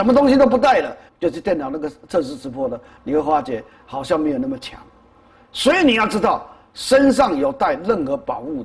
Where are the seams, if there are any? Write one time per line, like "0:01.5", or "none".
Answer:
0:01.1